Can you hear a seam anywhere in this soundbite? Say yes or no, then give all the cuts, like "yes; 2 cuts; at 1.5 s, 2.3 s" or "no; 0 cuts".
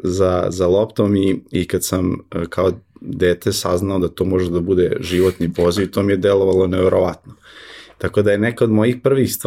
no; 0 cuts